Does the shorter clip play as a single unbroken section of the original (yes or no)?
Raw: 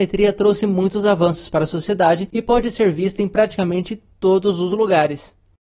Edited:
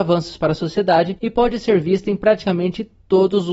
yes